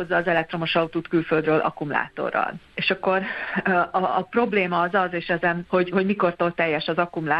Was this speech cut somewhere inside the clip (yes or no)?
yes